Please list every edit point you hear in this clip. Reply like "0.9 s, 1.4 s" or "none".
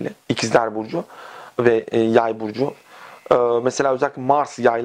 none